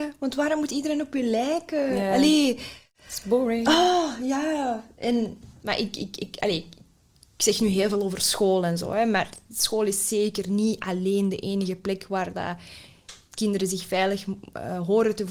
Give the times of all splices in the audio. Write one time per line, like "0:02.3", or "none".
none